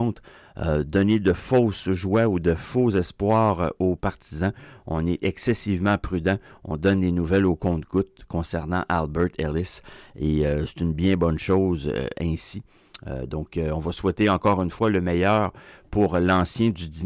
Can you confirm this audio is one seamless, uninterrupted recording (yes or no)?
yes